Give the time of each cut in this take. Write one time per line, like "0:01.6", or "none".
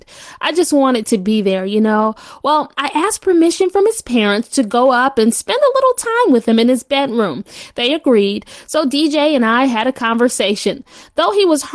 0:02.7

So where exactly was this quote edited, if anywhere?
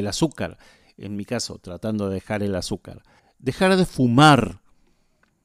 0:03.2

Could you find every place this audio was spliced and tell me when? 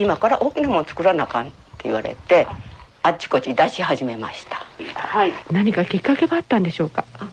0:04.9

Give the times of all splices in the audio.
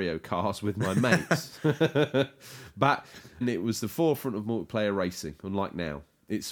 0:03.4

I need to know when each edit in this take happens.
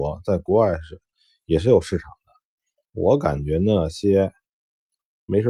none

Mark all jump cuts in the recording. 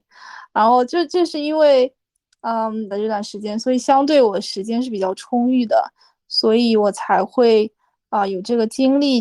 0:02.9

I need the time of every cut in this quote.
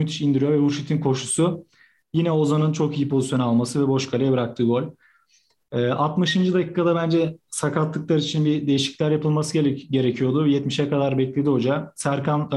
none

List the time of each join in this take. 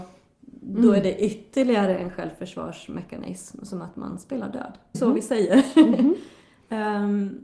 0:04.9

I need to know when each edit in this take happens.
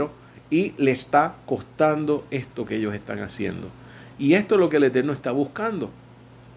0:04.1

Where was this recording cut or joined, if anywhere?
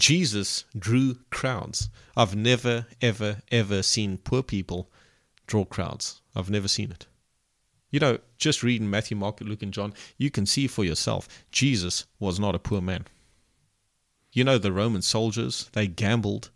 none

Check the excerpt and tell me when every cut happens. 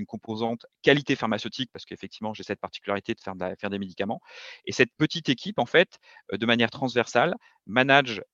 none

